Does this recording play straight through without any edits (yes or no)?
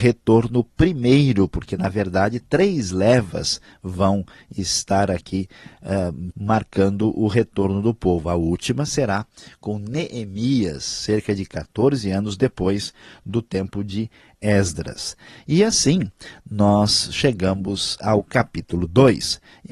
no